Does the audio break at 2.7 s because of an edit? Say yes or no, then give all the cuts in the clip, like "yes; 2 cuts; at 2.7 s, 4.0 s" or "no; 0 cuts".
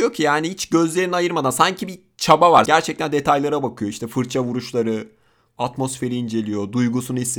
yes; 2 cuts; at 2.7 s, 5.5 s